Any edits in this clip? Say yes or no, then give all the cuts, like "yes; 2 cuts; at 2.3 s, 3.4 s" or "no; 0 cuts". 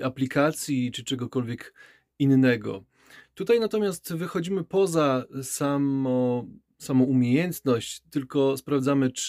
no; 0 cuts